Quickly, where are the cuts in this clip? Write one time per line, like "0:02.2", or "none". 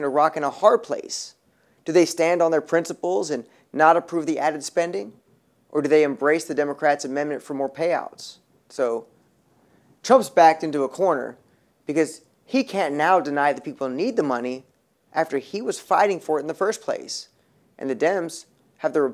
0:08.6